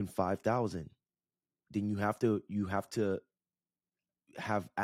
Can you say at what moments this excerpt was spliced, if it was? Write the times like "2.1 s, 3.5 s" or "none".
none